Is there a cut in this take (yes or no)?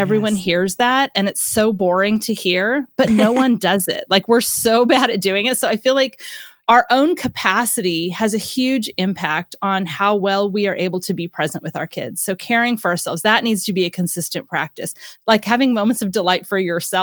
no